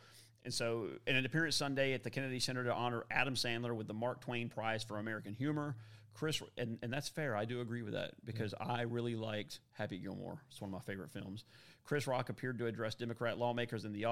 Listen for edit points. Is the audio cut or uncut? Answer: uncut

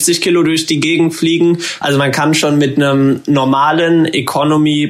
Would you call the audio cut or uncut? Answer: cut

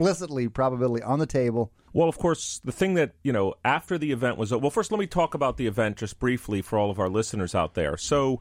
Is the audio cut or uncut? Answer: cut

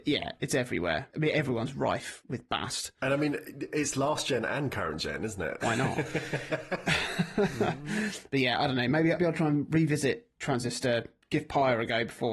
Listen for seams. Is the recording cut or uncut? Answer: cut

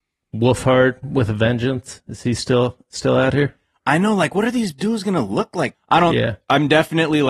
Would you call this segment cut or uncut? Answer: cut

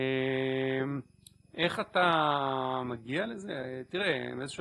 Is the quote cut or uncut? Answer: uncut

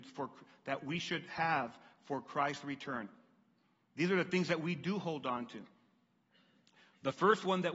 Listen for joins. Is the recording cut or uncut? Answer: uncut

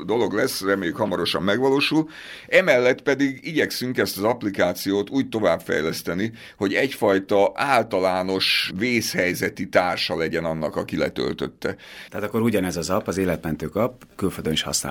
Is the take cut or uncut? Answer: cut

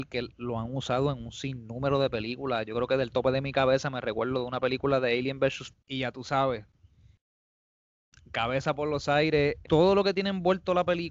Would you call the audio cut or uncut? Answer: cut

